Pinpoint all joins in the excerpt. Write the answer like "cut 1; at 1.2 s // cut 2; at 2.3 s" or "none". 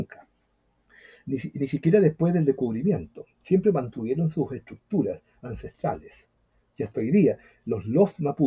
none